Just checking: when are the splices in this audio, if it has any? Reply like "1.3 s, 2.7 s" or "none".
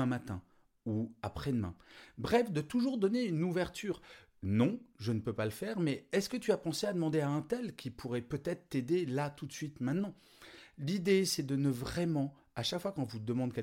none